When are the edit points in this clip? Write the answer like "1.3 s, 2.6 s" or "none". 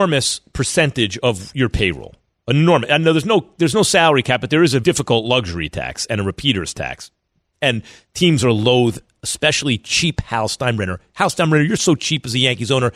4.8 s